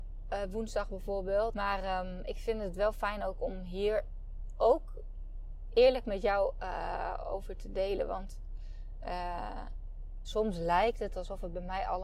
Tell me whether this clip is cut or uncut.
cut